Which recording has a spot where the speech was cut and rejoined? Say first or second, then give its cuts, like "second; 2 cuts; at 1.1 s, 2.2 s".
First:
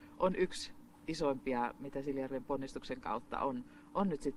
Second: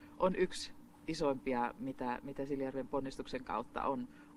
first; 1 cut; at 1.8 s